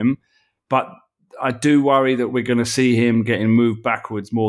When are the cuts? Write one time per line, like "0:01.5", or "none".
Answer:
none